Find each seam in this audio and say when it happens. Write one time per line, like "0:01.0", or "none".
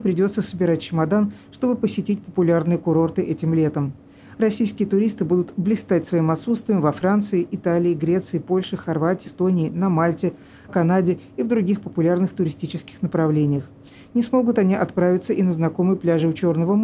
0:04.3
0:09.2
0:10.7

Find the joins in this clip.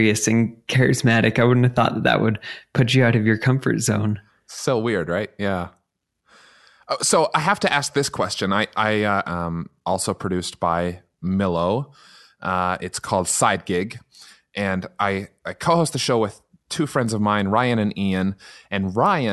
0:09.2

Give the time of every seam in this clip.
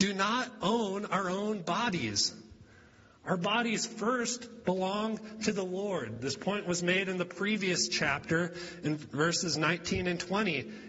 none

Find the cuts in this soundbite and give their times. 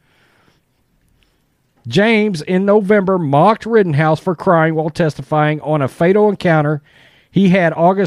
none

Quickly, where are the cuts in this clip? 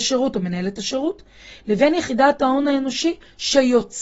none

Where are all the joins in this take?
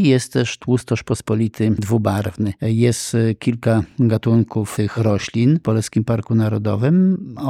0:02.6

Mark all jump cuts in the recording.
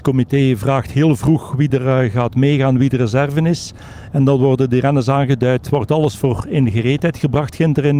none

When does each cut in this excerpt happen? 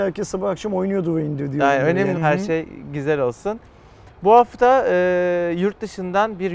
0:02.1

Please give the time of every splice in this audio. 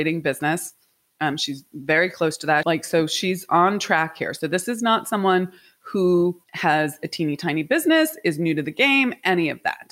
0:02.6
0:06.4

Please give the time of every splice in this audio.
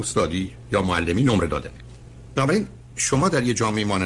0:02.3

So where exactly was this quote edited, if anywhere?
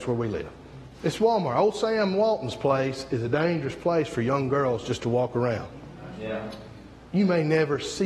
none

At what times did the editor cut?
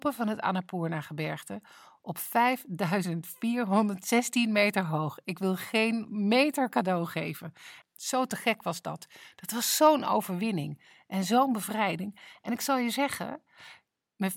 0:07.8

